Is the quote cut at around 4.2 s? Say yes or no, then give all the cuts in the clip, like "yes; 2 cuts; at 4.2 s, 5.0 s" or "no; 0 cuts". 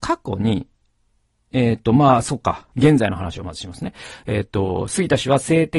no; 1 cut; at 2.7 s